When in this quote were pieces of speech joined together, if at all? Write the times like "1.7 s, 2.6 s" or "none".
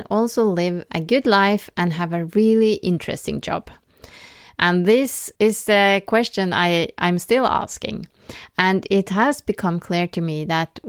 5.4 s

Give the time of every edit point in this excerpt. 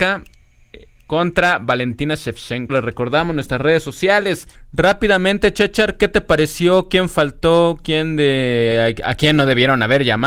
2.7 s, 4.5 s

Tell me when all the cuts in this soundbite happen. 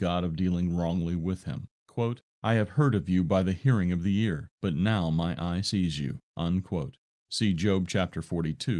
none

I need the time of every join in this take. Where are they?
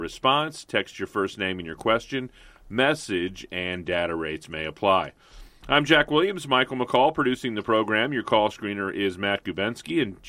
none

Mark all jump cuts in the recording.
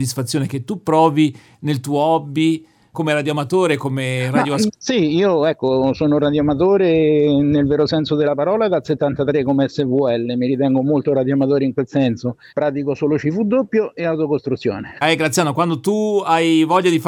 4.7 s, 12.5 s, 15.0 s

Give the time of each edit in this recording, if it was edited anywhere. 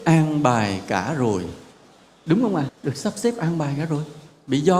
2.7 s

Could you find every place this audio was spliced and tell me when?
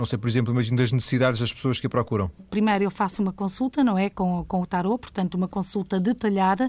2.4 s

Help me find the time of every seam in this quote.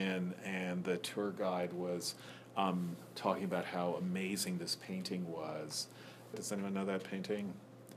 6.3 s

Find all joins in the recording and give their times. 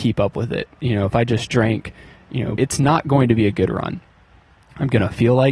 2.6 s

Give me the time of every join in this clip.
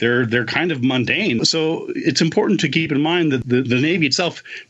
1.4 s

